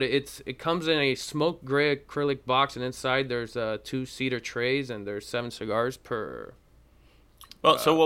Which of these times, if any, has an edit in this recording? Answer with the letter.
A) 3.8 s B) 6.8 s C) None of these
C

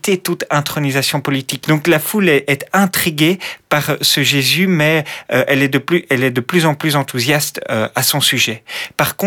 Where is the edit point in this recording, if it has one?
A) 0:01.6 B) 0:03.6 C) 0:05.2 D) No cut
A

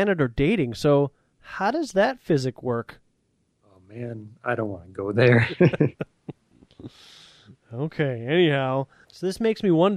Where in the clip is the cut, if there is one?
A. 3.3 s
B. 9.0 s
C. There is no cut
B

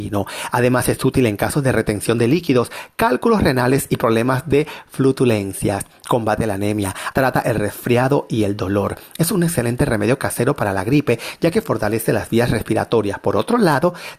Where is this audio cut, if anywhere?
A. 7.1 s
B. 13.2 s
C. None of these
A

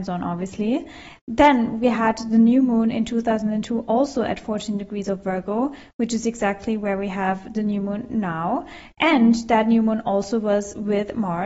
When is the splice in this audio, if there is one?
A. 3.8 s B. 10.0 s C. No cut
C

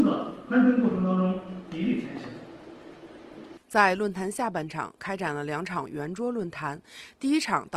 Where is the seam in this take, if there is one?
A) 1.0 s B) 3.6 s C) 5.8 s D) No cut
B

